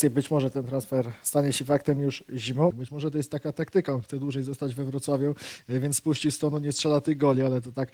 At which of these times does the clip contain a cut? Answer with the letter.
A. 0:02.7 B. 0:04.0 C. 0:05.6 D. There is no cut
A